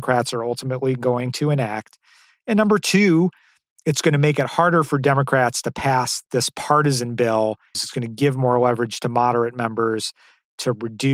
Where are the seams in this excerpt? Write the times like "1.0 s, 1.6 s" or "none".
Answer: 7.7 s